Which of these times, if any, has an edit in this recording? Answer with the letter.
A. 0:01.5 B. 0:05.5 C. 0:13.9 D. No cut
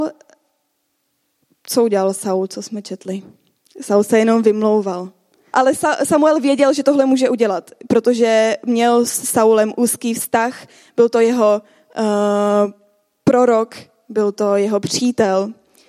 B